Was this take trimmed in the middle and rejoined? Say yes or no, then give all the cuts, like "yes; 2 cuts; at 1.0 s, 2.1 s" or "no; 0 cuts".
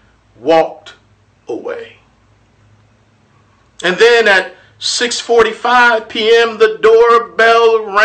no; 0 cuts